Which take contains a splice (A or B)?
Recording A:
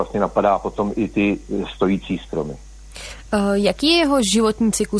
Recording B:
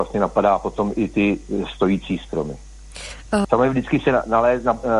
B